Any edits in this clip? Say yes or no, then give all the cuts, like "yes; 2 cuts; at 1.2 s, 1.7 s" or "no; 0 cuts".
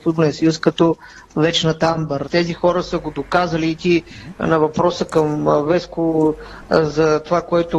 yes; 1 cut; at 2.2 s